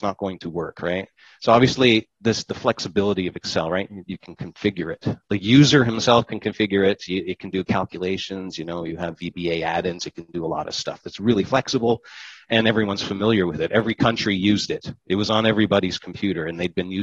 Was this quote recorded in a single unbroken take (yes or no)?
yes